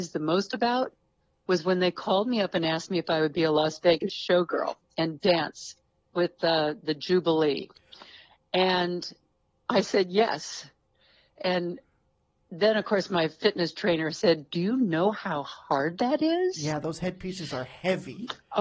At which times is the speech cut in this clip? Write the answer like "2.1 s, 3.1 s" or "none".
none